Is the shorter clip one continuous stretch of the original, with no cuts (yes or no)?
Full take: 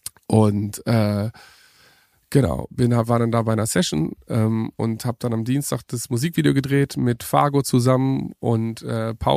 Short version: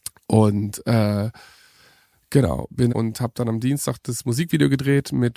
no